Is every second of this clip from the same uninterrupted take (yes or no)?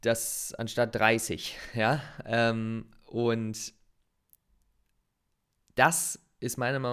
yes